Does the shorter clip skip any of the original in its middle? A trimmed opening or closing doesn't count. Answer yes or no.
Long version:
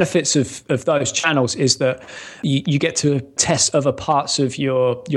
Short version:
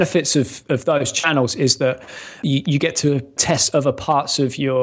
no